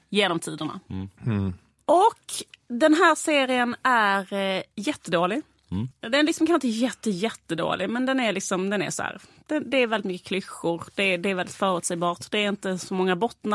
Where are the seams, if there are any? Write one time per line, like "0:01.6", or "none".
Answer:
none